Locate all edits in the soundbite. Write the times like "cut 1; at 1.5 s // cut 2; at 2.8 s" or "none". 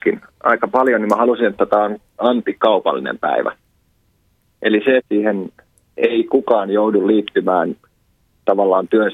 cut 1; at 5.0 s